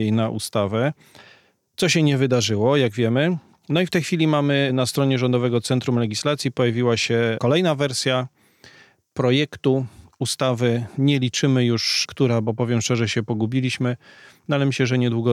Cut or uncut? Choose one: uncut